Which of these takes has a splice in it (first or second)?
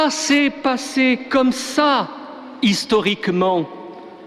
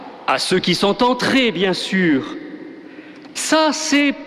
second